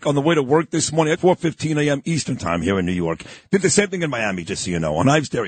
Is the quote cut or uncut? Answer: cut